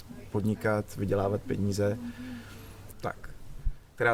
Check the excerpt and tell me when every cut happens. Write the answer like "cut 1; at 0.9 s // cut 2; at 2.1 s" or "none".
cut 1; at 2.9 s